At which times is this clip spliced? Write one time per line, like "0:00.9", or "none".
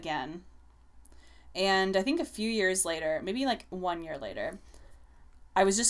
none